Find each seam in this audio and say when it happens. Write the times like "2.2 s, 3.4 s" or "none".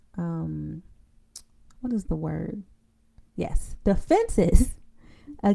3.4 s

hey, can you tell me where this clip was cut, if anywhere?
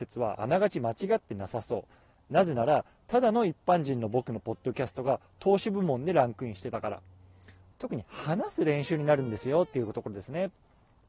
7.7 s

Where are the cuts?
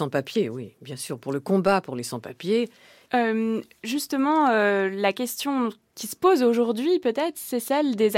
3.1 s

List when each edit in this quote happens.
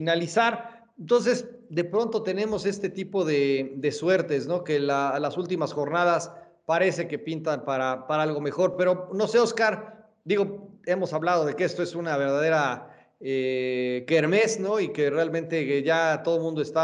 none

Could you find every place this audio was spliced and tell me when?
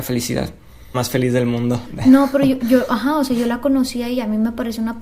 0.9 s

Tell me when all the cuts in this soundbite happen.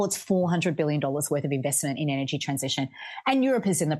none

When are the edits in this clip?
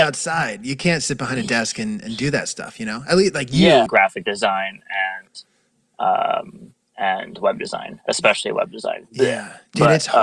3.9 s

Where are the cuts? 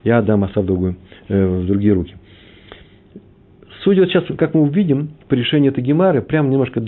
none

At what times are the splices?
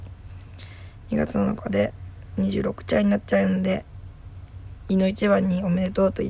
4.9 s

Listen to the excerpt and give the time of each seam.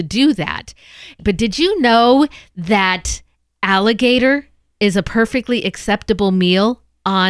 none

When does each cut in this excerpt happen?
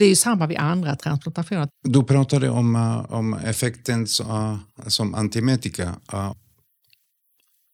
1.7 s

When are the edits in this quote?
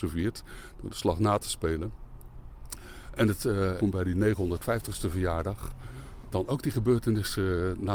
3.8 s, 6.3 s

